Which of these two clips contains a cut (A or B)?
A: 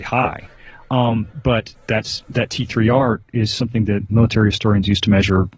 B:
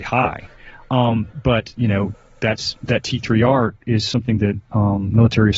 A